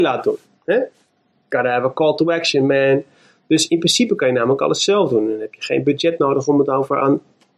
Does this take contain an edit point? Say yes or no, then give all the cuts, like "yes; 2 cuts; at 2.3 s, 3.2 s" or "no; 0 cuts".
no; 0 cuts